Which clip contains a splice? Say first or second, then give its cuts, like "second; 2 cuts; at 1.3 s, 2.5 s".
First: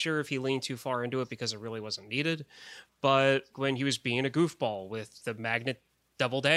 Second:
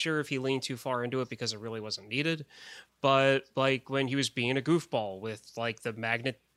first; 2 cuts; at 3.5 s, 5.2 s